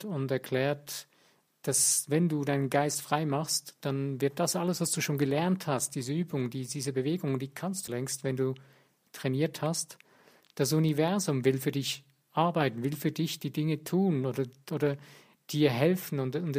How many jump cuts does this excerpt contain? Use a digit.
2